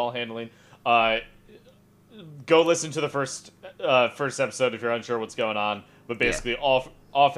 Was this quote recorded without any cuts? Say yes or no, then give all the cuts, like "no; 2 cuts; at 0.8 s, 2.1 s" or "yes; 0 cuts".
yes; 0 cuts